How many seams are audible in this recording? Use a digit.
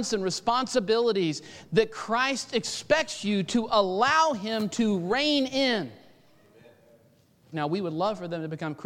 1